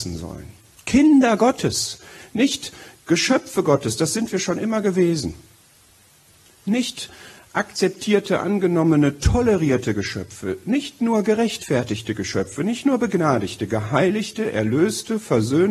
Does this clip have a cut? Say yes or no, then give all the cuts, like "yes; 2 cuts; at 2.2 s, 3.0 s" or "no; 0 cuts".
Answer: no; 0 cuts